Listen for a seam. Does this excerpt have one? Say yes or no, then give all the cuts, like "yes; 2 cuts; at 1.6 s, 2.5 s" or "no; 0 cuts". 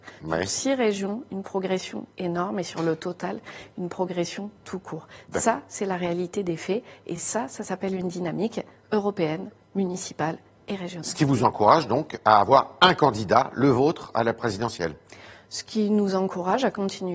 no; 0 cuts